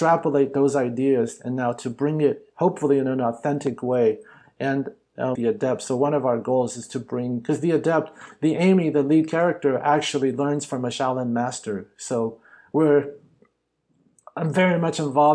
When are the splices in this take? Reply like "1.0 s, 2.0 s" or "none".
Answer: 5.4 s